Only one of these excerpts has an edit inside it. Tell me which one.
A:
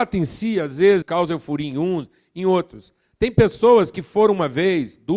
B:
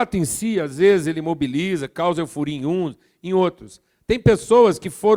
A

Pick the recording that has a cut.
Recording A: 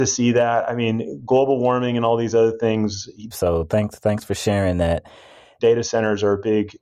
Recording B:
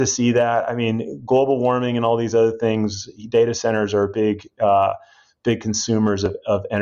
A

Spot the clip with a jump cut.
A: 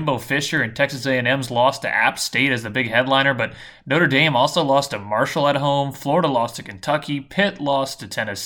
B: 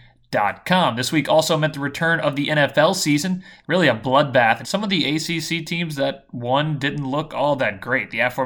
B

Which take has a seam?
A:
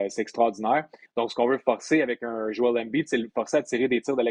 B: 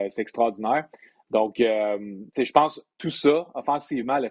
A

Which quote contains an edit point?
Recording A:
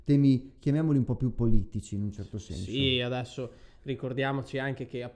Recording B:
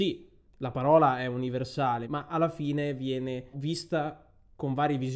B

